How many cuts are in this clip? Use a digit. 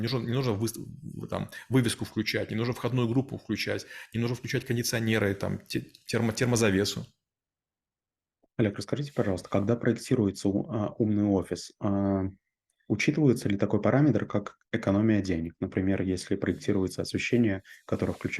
0